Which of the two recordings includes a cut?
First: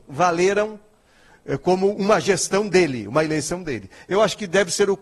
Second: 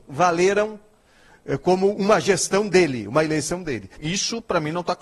second; 1 cut; at 4.0 s

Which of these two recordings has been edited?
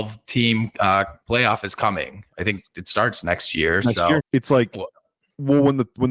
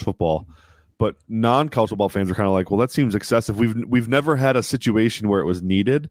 first; 1 cut; at 4.2 s

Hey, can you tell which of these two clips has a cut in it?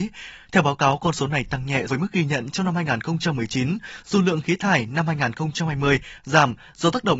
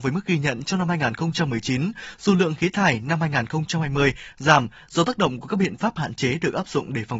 first; 1 cut; at 1.9 s

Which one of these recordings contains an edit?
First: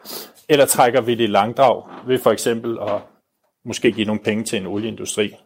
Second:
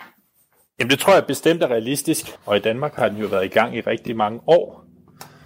second; 1 cut; at 2.3 s

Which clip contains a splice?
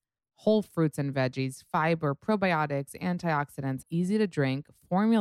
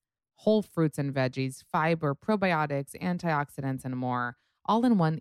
first; 1 cut; at 3.8 s

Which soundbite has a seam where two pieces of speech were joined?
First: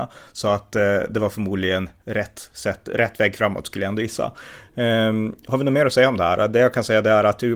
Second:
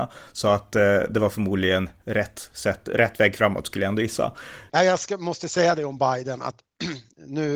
second; 1 cut; at 4.7 s

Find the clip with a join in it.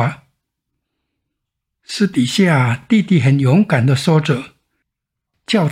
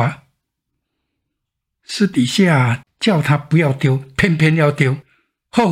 second; 1 cut; at 2.8 s

